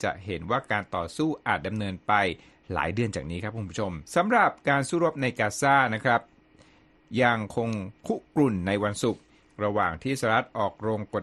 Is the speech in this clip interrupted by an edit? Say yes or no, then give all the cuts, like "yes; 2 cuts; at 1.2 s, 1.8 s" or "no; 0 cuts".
yes; 1 cut; at 4.1 s